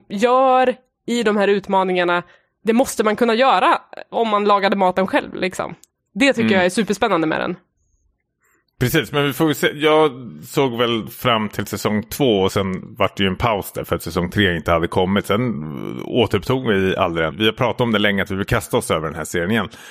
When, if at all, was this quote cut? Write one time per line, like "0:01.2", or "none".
0:17.3

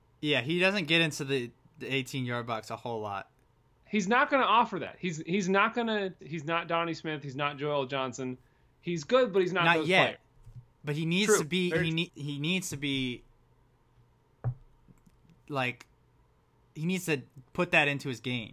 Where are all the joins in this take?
0:06.2
0:12.1

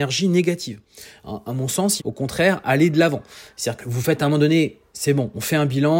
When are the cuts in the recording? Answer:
0:02.0
0:03.8
0:04.9

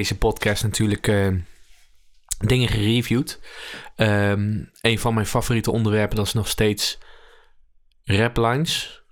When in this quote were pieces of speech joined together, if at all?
none

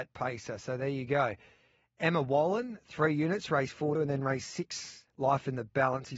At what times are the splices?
0:04.0
0:05.1

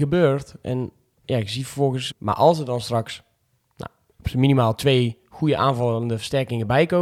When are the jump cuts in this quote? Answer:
0:02.1
0:04.1

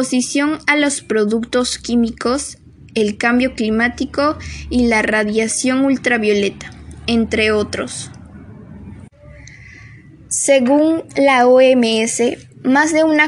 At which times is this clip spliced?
none

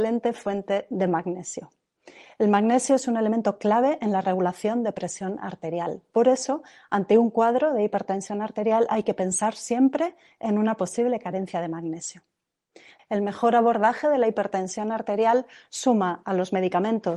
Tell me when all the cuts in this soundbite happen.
0:13.0

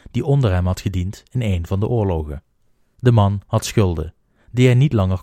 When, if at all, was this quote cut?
0:02.9

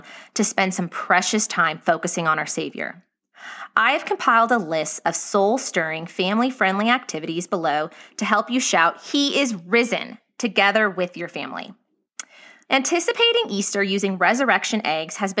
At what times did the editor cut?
0:12.7

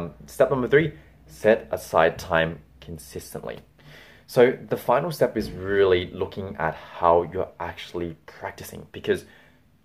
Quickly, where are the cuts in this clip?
none

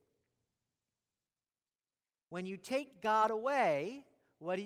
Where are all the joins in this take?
none

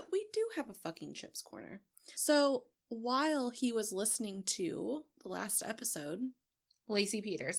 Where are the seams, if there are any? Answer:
0:02.1
0:05.1

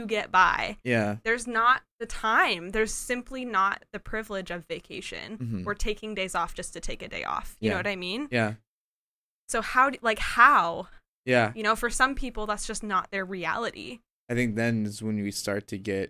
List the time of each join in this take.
none

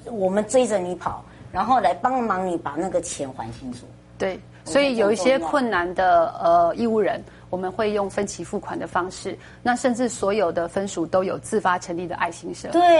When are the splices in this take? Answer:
none

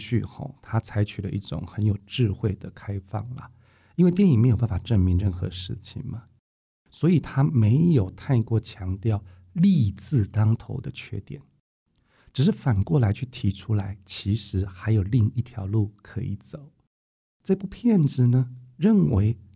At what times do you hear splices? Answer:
none

